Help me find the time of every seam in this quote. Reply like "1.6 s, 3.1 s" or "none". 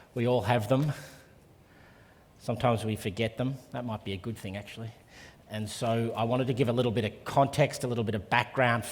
5.4 s